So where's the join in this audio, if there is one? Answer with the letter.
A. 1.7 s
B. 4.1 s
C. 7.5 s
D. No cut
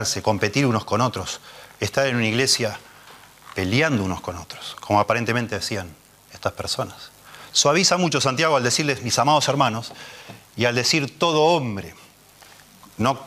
D